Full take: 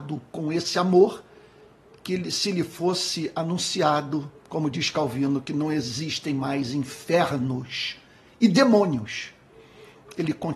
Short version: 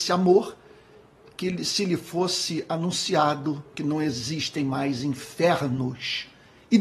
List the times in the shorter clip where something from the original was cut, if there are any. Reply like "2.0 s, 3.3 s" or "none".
3.7 s